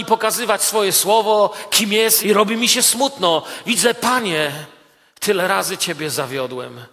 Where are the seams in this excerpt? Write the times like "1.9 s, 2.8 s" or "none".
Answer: 2.2 s